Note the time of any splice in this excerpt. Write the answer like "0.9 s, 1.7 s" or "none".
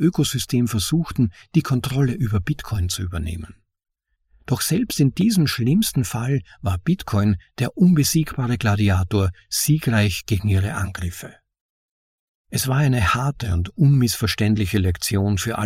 none